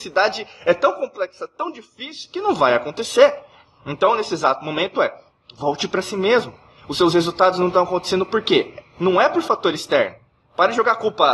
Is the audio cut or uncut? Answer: uncut